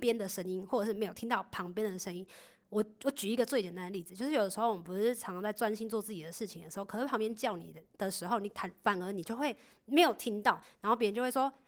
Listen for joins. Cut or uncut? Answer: uncut